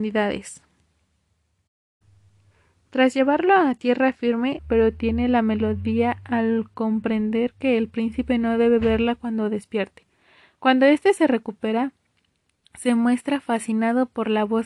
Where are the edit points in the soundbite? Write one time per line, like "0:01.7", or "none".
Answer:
0:04.6